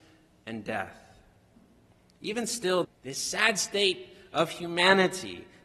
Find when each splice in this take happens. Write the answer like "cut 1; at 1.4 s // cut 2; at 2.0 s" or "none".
cut 1; at 2.8 s